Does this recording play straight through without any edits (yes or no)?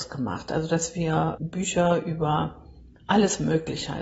no